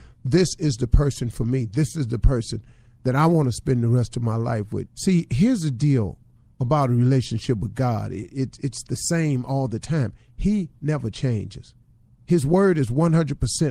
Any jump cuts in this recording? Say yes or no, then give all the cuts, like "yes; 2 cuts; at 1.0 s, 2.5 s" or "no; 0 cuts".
yes; 1 cut; at 4.9 s